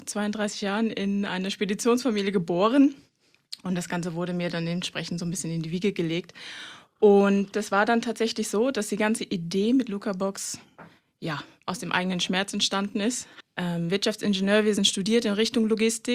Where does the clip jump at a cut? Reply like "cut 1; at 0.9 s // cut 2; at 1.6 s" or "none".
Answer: cut 1; at 13.4 s